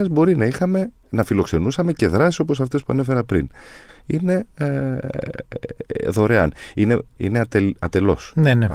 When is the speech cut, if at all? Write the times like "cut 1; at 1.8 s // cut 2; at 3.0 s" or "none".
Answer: cut 1; at 3.9 s // cut 2; at 7.2 s